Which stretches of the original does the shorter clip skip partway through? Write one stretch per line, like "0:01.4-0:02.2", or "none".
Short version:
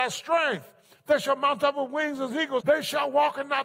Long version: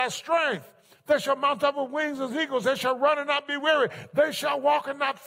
0:02.6-0:04.1